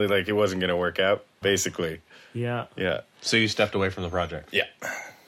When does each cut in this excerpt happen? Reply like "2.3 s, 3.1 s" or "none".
1.4 s